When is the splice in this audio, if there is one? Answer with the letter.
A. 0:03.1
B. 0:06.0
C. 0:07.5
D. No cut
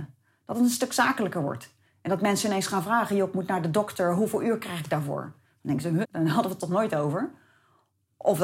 B